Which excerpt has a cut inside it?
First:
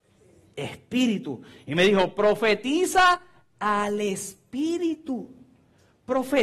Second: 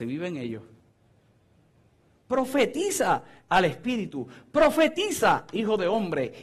second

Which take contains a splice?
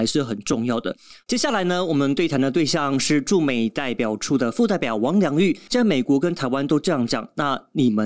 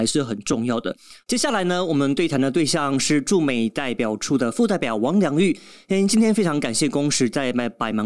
first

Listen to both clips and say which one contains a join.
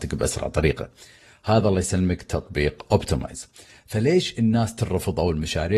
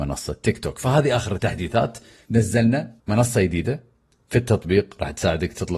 second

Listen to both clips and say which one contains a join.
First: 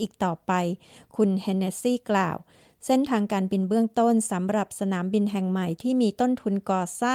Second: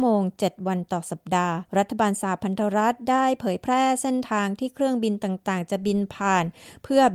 second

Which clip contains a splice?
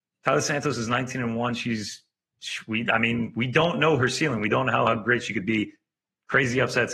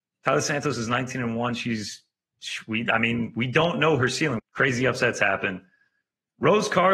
second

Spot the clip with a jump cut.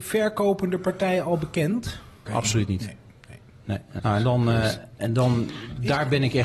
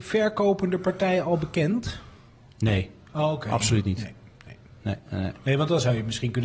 first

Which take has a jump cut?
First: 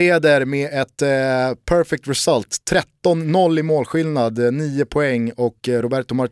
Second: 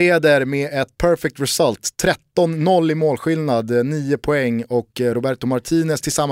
second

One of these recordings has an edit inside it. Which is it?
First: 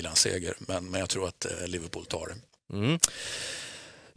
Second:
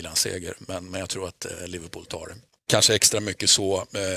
second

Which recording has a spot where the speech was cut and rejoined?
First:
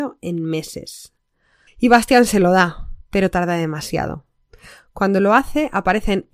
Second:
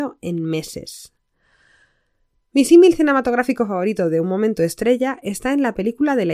first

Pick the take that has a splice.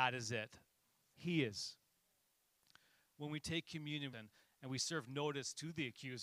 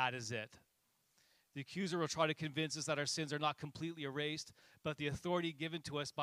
first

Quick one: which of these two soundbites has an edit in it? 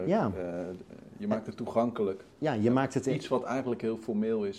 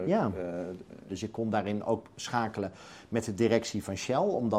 second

